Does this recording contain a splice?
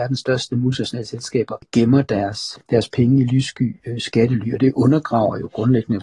no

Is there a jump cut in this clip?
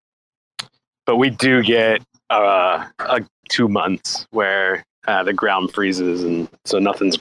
yes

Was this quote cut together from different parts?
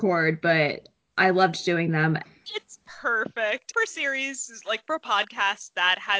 yes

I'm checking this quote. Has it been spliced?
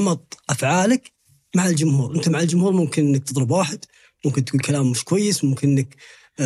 no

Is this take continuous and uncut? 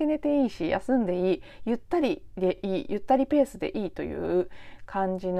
yes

